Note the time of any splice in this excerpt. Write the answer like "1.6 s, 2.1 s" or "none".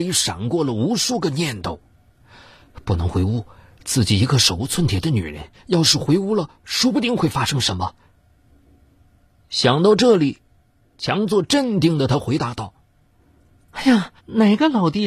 14.2 s